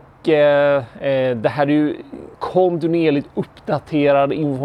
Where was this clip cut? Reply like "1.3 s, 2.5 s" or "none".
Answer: 2.3 s